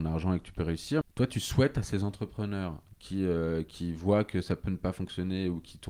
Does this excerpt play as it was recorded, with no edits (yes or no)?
no